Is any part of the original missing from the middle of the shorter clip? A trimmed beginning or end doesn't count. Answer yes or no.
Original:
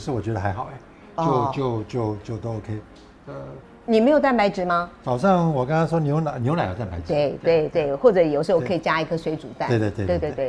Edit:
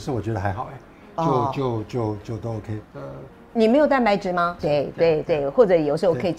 yes